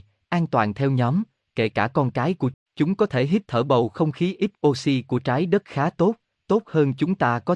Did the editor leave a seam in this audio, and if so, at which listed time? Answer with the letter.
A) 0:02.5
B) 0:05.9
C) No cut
A